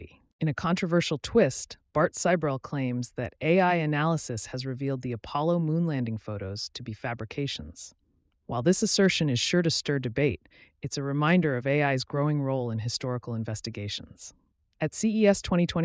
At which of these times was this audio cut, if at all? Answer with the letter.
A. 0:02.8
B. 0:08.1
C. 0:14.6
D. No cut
D